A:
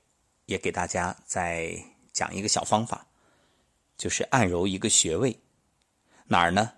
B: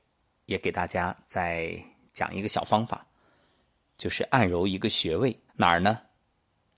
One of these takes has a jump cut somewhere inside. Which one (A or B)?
B